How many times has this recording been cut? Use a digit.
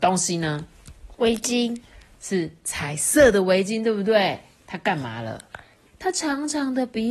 1